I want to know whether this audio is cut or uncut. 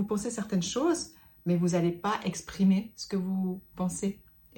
uncut